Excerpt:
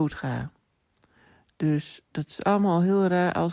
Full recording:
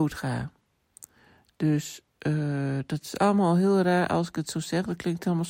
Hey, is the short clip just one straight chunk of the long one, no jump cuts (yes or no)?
no